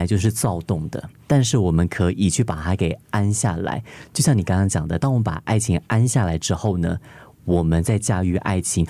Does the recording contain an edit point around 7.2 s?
no; 1 cut; at 1.2 s

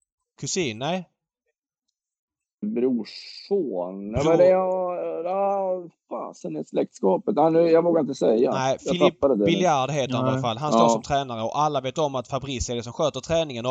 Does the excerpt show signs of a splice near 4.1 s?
no; 1 cut; at 2.6 s

